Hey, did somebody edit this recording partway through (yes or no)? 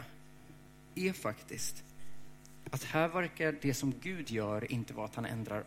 no